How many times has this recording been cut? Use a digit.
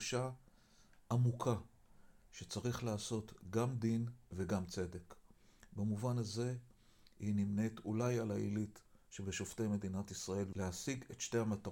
1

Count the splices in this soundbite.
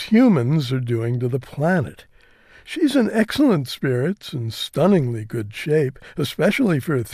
0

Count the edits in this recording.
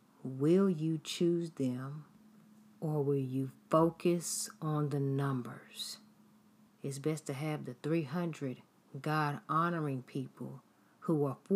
1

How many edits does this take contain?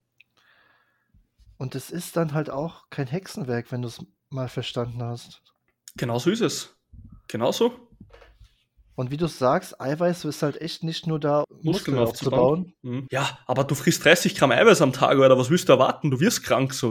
2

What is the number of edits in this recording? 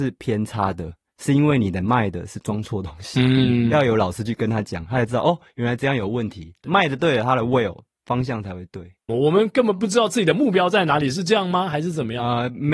1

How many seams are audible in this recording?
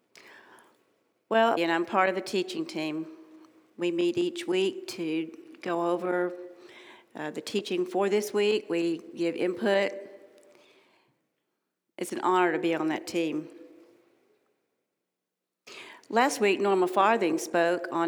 1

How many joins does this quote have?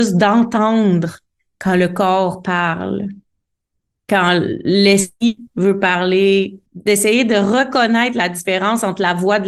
1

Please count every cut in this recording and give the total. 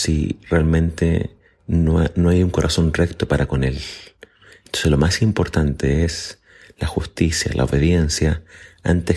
0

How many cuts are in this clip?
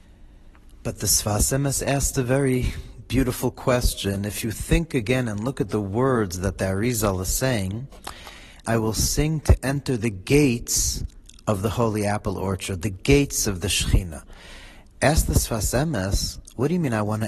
1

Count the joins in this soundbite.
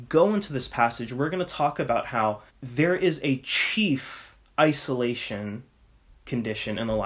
1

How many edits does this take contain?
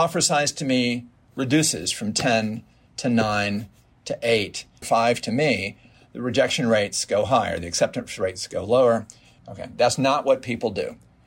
2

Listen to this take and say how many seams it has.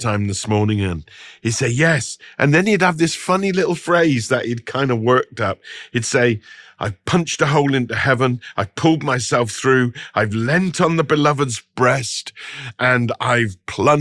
0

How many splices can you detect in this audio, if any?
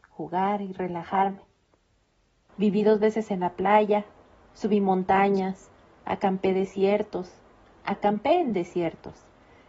1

